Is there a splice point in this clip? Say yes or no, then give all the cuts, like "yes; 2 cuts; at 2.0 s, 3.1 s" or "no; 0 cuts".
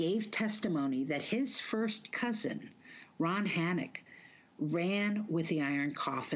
no; 0 cuts